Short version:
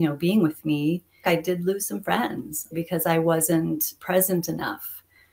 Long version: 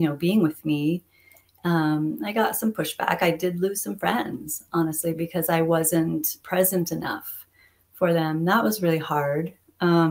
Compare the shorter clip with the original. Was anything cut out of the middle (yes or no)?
yes